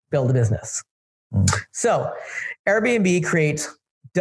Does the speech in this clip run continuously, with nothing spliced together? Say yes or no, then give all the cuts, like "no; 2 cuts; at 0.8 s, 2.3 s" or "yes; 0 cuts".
no; 1 cut; at 1.2 s